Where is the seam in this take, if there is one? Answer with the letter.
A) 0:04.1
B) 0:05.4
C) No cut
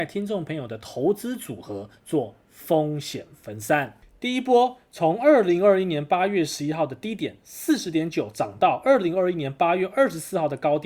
C